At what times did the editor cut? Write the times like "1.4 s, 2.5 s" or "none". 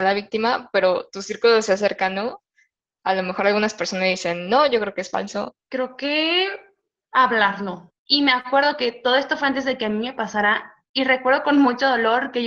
5.6 s, 7.9 s, 10.8 s

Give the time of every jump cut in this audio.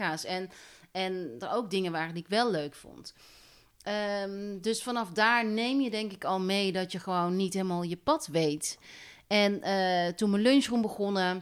none

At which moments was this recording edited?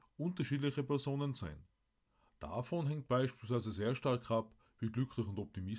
none

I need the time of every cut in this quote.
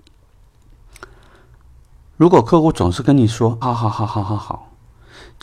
3.6 s

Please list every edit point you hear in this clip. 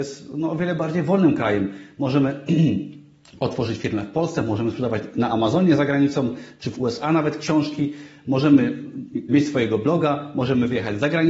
4.4 s, 9.3 s

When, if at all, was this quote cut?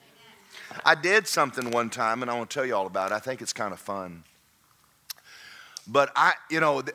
none

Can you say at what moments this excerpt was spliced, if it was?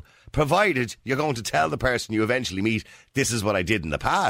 none

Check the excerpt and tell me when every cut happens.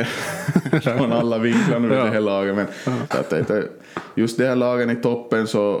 3.1 s

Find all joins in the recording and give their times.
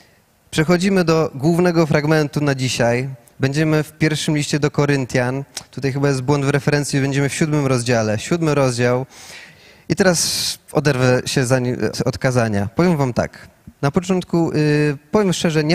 11.9 s, 13.8 s

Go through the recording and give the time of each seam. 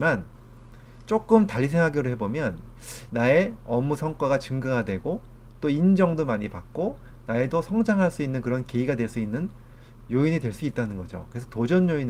3.1 s

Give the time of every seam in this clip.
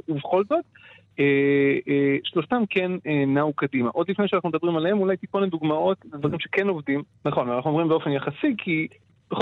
7.1 s

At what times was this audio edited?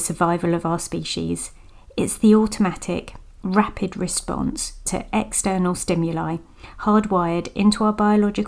none

